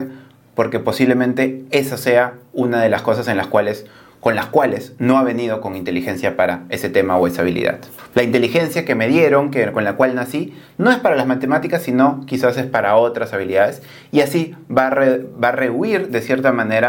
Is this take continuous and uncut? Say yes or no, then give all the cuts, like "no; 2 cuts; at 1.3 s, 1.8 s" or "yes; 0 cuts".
no; 1 cut; at 8.1 s